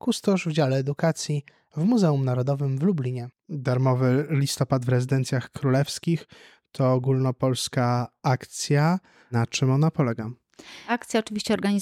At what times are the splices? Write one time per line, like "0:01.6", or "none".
none